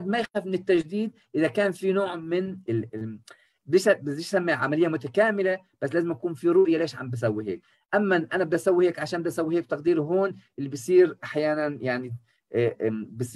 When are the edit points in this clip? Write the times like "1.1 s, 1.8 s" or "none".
2.7 s